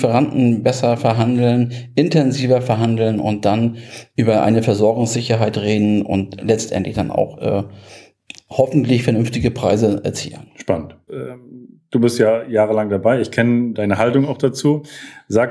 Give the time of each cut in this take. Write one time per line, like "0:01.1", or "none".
0:11.1
0:13.7